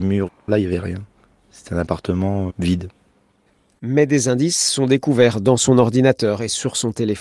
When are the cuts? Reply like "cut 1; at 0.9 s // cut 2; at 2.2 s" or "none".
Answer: cut 1; at 2.5 s